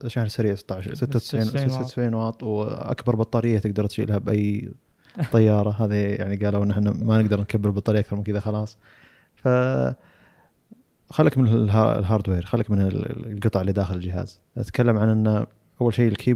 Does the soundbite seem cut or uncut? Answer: cut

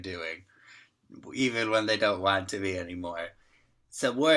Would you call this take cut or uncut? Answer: uncut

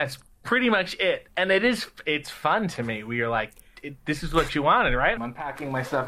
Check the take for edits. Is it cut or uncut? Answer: cut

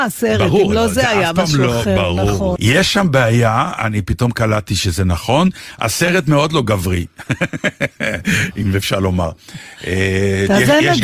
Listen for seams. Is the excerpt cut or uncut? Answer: cut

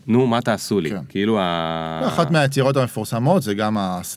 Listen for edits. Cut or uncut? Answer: uncut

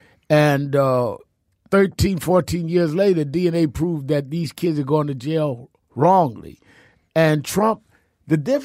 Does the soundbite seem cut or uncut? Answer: uncut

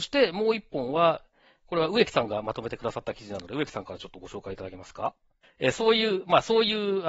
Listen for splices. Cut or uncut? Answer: cut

